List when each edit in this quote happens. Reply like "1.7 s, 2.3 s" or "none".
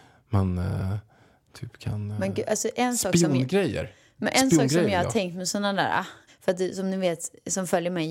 6.3 s